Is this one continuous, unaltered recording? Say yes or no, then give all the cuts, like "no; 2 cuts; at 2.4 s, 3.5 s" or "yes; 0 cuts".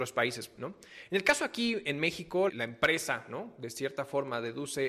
no; 1 cut; at 2.5 s